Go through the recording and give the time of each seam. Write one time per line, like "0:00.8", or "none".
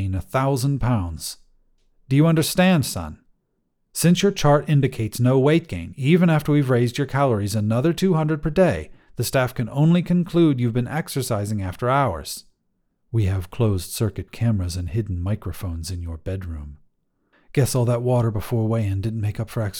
0:03.8
0:17.3